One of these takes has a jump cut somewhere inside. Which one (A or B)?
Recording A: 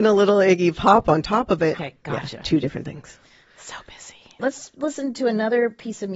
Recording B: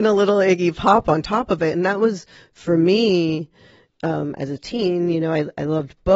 A